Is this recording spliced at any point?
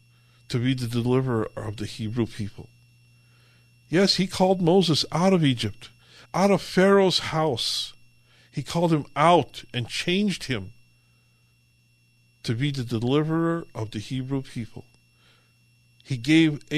yes; 1 cut; at 6.2 s

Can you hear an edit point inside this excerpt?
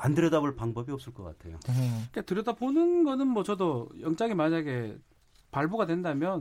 no; 0 cuts

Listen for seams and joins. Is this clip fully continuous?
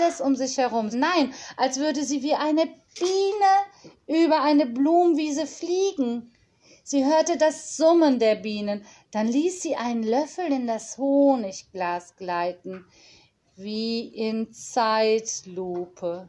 no; 1 cut; at 0.9 s

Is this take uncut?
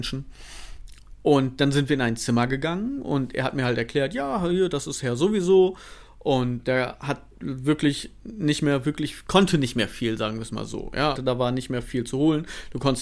no; 2 cuts; at 6.6 s, 11.2 s

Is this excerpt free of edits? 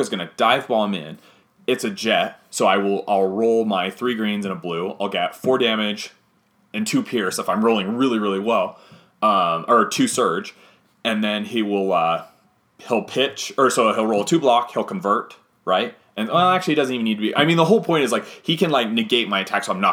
yes; 0 cuts

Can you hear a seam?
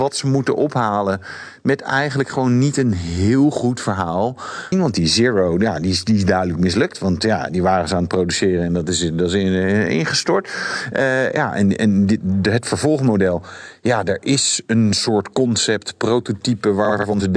yes; 1 cut; at 4.7 s

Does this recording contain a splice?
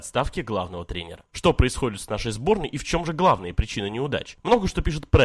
yes; 1 cut; at 1.3 s

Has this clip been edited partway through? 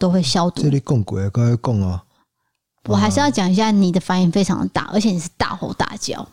no; 0 cuts

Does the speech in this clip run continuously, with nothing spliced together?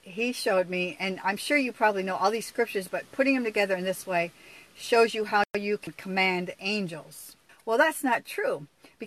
no; 1 cut; at 7.5 s

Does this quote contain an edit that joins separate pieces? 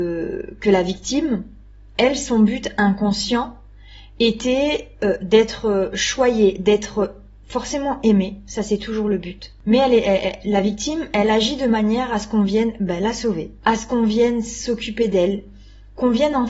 no; 0 cuts

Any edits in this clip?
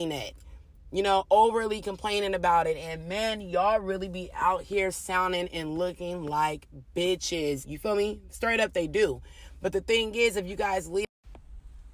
yes; 1 cut; at 7.6 s

